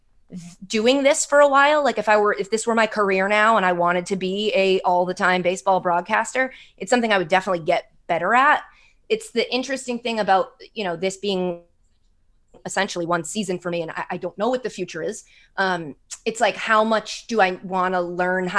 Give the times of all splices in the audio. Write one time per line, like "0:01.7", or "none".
none